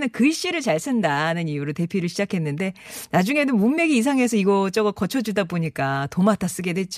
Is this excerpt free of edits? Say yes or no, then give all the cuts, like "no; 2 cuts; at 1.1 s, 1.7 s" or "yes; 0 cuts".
yes; 0 cuts